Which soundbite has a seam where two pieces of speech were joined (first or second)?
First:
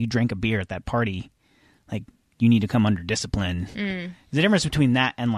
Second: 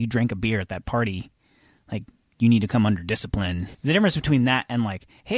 second